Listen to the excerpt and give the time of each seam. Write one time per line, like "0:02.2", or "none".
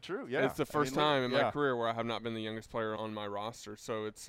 0:03.0